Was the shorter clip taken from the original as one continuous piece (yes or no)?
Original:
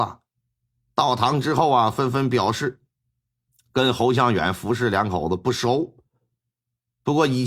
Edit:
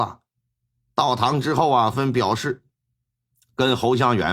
no